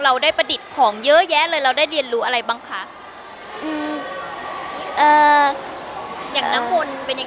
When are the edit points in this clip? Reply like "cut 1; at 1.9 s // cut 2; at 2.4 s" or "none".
none

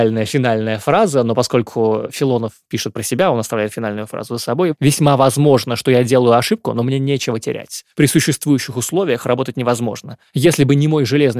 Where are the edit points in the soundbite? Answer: none

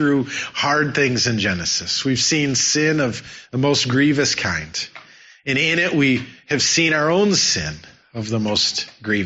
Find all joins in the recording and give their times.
none

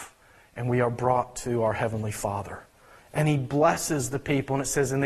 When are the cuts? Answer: cut 1; at 3.0 s

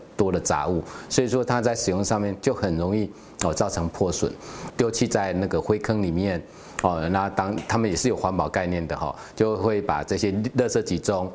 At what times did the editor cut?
cut 1; at 4.7 s

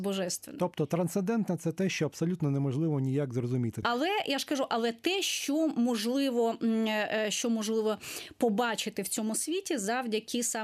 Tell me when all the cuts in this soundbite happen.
cut 1; at 3.8 s

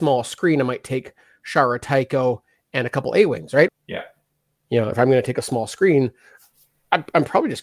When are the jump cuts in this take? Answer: cut 1; at 3.7 s // cut 2; at 4.9 s

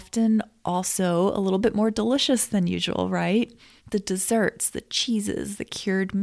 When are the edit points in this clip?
none

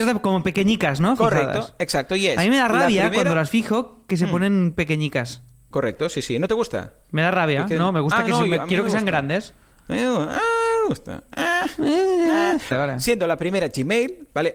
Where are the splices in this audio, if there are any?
cut 1; at 12.7 s

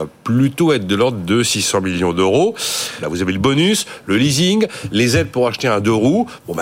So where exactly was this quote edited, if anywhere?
cut 1; at 3.0 s

